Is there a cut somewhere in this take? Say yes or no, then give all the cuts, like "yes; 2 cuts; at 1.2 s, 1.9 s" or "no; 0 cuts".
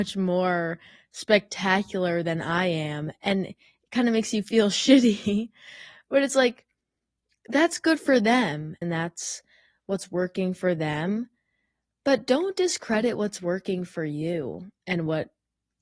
yes; 1 cut; at 8.8 s